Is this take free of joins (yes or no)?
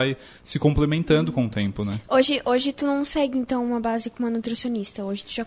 yes